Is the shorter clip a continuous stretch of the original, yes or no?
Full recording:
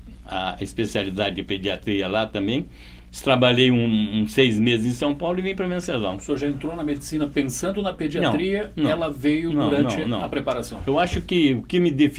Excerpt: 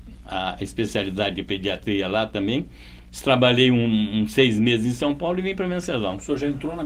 yes